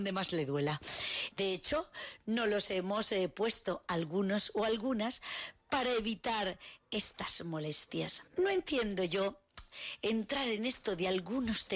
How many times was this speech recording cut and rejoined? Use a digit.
2